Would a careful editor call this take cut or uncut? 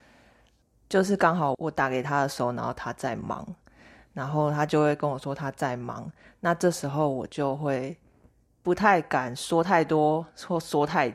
cut